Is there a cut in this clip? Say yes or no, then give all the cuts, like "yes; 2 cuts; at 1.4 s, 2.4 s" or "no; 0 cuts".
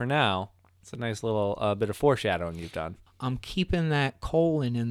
yes; 1 cut; at 3.1 s